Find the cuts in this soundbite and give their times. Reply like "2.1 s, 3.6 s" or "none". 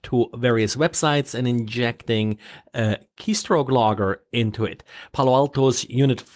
5.1 s